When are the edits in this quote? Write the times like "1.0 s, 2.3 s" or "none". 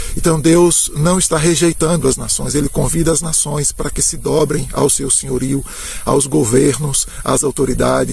none